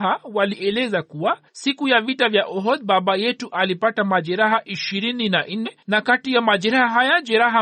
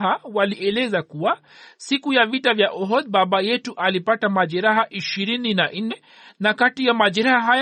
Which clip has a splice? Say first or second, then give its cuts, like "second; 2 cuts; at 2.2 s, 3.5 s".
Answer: first; 2 cuts; at 1.5 s, 5.8 s